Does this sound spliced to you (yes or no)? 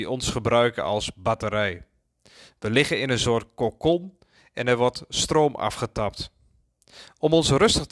no